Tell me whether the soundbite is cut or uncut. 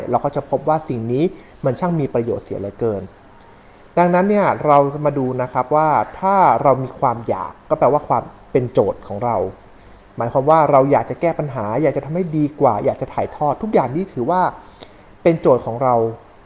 uncut